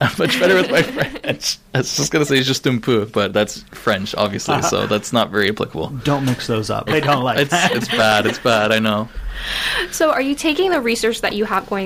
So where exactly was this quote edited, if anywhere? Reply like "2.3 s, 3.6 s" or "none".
6.9 s

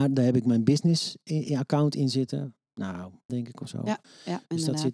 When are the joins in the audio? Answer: 3.3 s

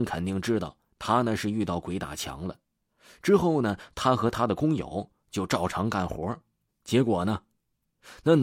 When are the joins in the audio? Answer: 6.7 s

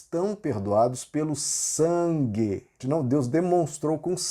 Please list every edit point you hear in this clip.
2.8 s

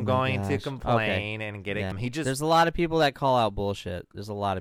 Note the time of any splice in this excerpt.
1.9 s

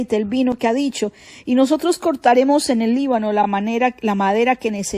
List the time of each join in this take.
none

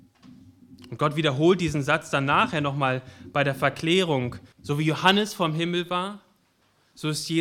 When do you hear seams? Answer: 4.5 s

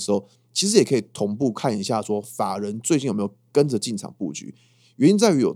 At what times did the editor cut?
none

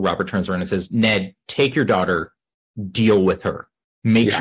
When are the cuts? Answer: none

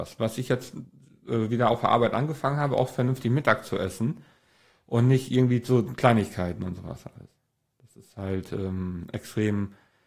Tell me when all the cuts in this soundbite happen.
none

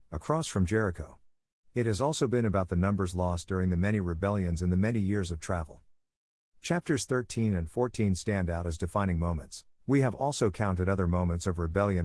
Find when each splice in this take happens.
9.7 s

